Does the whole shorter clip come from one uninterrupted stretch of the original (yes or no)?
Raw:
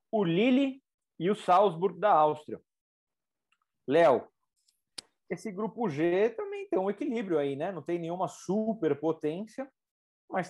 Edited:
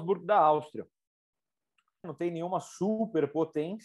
no